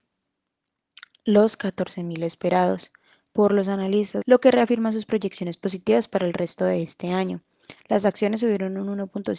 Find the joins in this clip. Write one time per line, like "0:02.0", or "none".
0:04.2
0:07.8